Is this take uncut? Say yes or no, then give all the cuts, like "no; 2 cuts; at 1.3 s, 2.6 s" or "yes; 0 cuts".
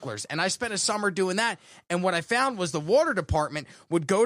yes; 0 cuts